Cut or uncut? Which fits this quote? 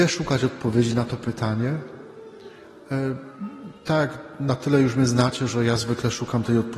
uncut